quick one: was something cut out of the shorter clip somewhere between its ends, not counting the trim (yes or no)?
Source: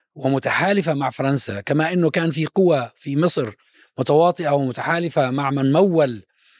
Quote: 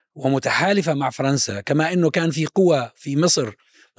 no